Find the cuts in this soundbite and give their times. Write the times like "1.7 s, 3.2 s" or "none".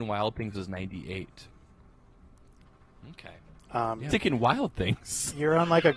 4.1 s